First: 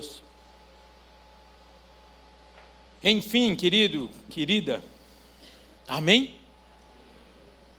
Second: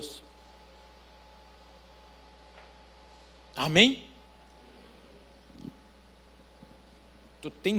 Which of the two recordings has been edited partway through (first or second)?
first